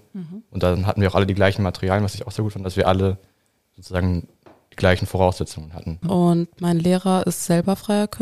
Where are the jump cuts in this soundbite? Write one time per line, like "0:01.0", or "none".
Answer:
0:06.0